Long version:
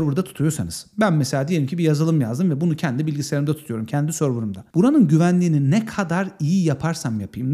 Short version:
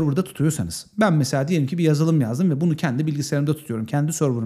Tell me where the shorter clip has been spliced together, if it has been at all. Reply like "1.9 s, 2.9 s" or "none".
none